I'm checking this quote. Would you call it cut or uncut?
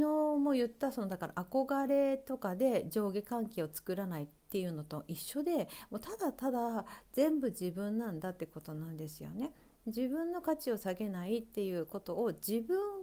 uncut